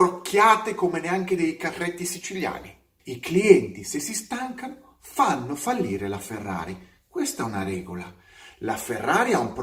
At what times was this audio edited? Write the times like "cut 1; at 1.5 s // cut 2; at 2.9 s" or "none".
cut 1; at 3.0 s // cut 2; at 8.5 s